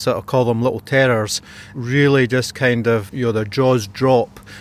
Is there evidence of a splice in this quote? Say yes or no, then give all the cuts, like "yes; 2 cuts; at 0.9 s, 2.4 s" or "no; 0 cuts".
yes; 1 cut; at 3.1 s